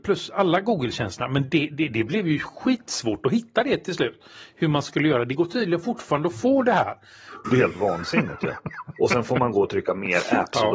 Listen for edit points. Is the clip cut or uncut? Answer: cut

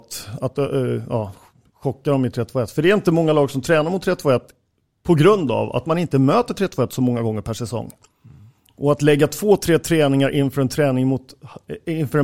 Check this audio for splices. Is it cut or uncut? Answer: uncut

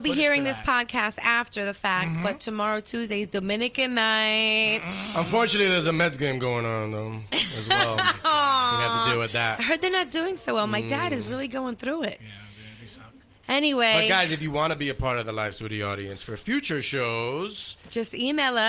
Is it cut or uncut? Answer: uncut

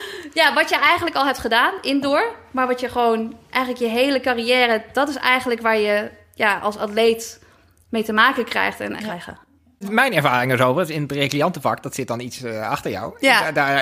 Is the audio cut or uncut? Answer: cut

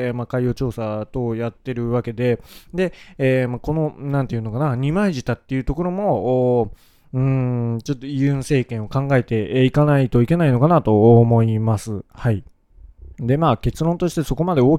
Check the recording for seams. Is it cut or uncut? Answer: uncut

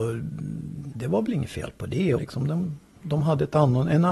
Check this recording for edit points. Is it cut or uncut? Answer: cut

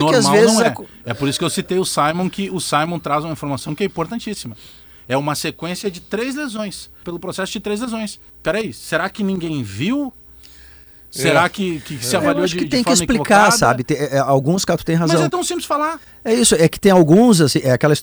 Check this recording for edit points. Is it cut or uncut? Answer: cut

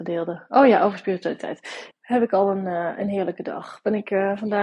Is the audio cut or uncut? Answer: cut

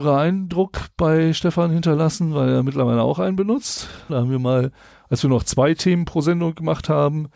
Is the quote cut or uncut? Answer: cut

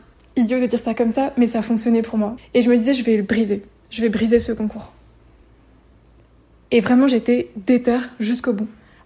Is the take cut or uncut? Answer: cut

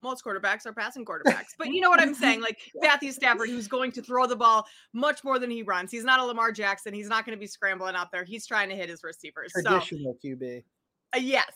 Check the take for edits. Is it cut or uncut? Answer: uncut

